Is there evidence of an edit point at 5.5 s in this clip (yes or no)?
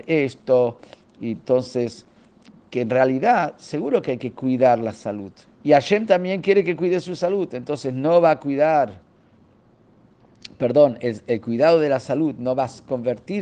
yes